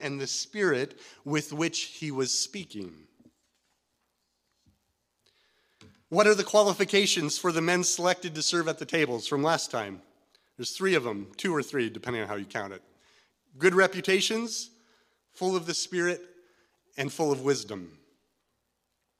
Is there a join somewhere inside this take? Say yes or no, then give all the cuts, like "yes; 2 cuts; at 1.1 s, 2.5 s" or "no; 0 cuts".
no; 0 cuts